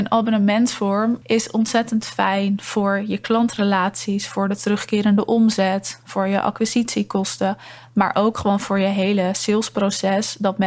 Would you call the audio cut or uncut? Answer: cut